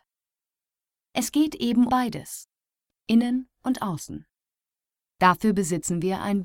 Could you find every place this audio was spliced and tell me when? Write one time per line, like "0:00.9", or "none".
0:01.9